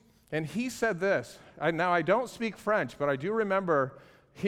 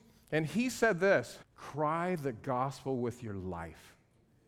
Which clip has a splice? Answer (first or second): second